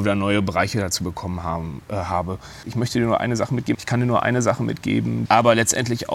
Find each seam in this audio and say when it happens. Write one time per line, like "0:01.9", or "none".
0:02.6
0:03.7
0:05.2